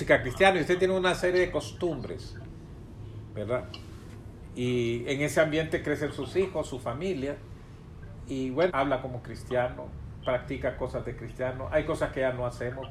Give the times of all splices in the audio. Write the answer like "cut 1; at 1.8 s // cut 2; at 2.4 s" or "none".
cut 1; at 8.7 s

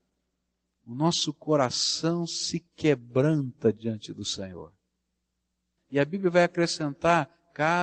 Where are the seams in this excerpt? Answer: cut 1; at 5.8 s

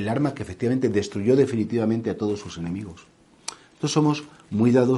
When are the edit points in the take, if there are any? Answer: none

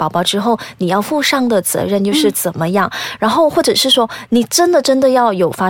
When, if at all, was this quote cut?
none

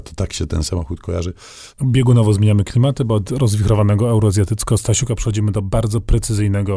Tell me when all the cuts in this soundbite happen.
cut 1; at 1.7 s

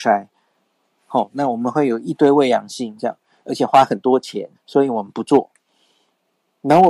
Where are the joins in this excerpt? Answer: cut 1; at 3.0 s // cut 2; at 4.5 s

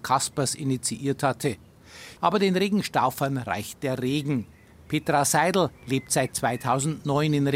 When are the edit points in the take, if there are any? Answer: cut 1; at 2.2 s // cut 2; at 5.7 s

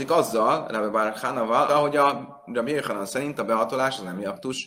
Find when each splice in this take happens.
cut 1; at 1.7 s

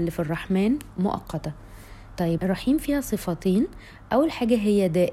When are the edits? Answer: cut 1; at 2.4 s

